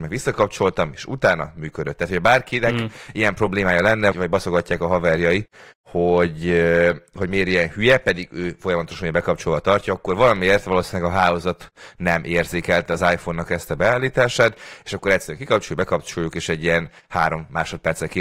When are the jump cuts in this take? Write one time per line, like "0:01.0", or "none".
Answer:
0:04.1